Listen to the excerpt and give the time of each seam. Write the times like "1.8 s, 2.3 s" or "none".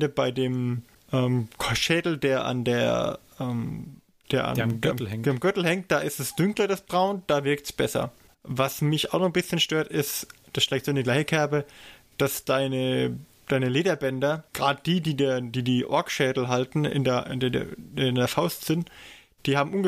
8.3 s, 14.5 s